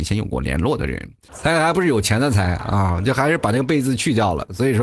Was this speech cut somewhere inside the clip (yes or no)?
yes